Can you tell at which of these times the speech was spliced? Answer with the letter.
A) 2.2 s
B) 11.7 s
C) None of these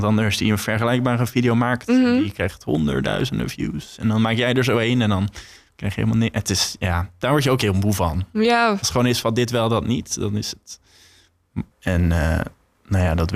B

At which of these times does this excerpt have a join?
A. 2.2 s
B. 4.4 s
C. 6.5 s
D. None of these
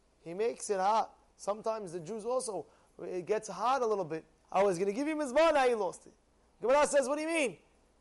B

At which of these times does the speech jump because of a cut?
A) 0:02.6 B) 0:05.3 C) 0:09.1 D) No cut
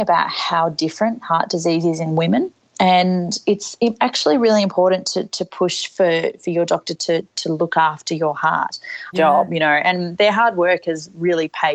C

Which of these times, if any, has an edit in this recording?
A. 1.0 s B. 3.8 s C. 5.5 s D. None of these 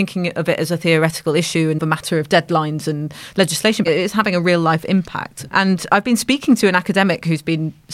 B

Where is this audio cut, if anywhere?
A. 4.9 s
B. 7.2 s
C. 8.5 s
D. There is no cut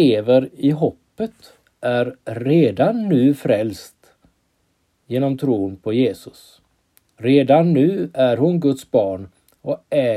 D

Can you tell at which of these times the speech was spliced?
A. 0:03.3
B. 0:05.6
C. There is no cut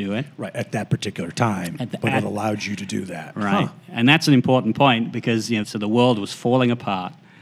B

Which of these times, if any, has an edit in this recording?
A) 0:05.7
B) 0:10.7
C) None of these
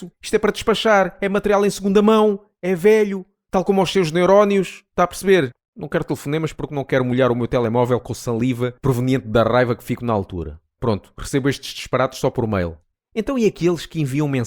A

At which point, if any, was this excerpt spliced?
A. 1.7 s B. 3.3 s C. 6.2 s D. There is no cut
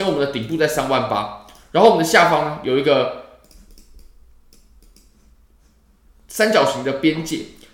D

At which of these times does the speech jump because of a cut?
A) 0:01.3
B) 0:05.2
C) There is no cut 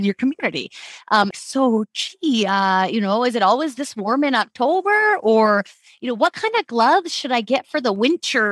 A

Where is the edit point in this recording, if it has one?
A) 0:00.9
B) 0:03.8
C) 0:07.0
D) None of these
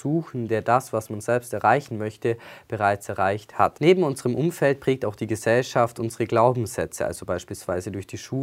D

